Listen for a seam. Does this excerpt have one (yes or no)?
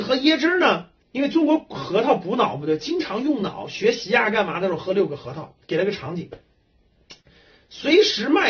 yes